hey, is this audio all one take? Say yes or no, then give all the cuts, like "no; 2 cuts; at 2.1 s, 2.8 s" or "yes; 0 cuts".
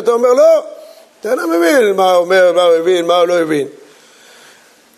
yes; 0 cuts